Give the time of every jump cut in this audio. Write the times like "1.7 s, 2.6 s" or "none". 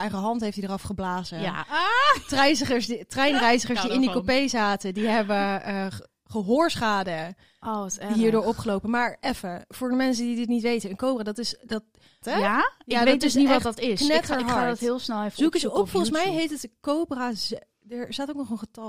12.2 s

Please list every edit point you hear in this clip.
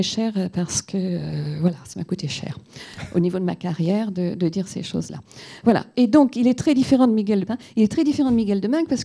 7.5 s

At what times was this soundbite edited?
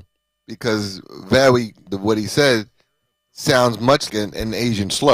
1.9 s, 4.1 s

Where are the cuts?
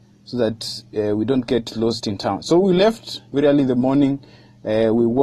none

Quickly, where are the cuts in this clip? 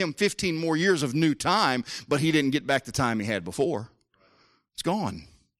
none

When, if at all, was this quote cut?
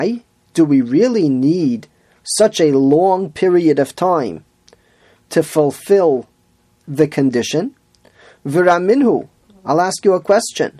none

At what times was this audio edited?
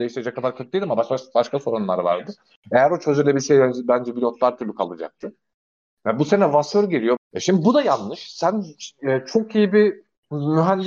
7.2 s

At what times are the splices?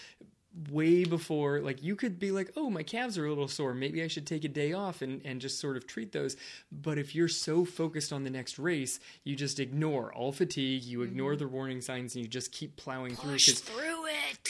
none

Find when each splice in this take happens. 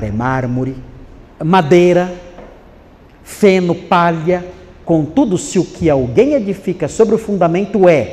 1.2 s, 4.8 s

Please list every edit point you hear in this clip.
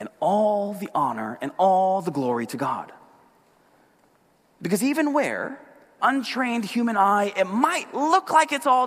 6.0 s

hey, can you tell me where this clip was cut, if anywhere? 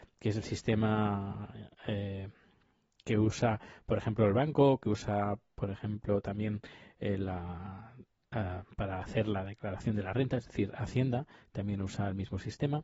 none

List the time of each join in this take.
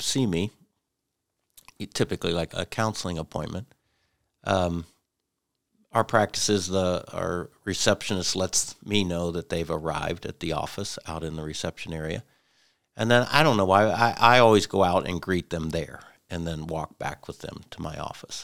2.5 s

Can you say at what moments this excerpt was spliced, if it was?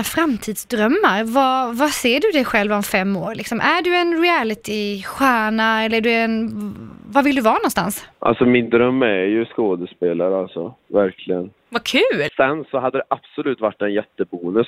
8.1 s, 12.3 s

